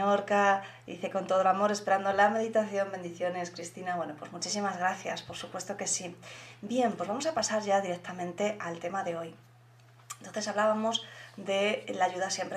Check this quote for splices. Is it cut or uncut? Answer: uncut